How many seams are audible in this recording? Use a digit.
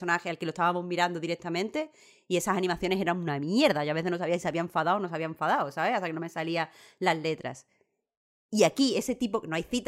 0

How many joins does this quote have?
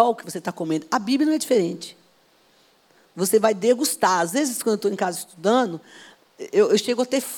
0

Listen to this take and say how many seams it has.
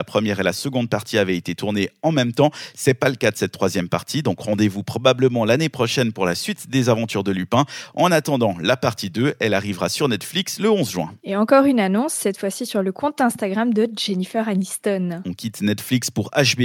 1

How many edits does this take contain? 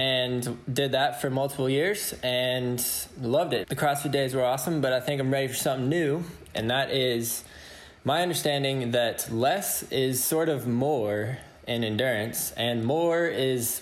3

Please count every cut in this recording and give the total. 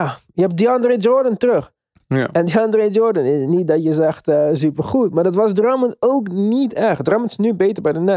0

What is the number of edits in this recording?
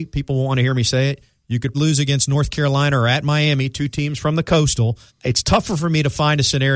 2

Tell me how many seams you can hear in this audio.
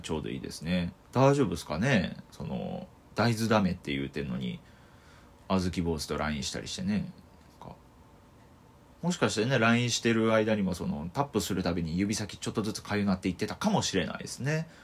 1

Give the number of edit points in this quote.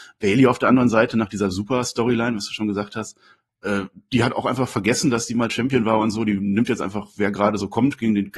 0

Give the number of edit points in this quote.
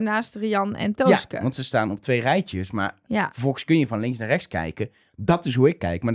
0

